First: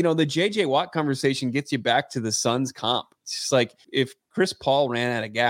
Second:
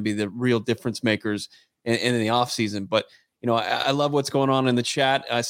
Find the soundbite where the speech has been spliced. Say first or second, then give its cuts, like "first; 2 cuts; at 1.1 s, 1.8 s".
first; 1 cut; at 3.8 s